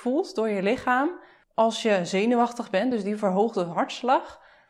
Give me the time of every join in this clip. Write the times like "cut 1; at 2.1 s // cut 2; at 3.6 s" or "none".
none